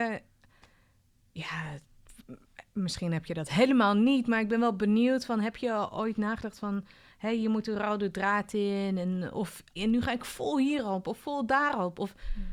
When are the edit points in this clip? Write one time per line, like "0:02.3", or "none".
0:09.8